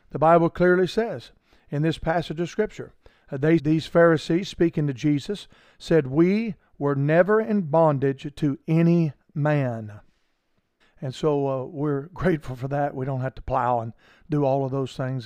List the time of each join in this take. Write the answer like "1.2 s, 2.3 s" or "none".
3.6 s, 10.8 s